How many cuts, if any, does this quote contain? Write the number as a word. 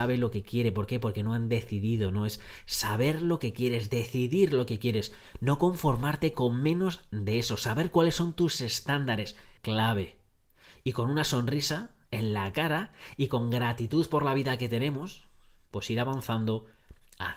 one